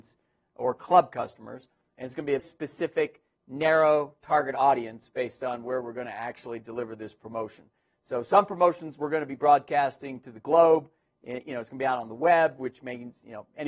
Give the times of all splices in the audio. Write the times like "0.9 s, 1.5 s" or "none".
2.4 s